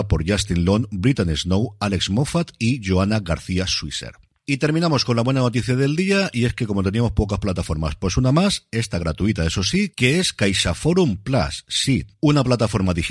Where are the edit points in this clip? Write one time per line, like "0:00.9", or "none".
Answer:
none